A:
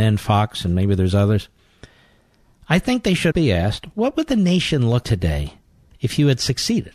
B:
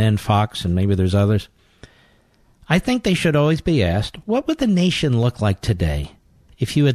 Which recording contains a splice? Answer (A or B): A